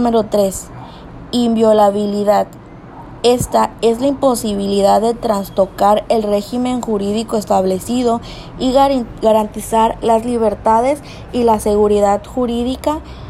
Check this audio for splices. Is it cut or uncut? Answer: uncut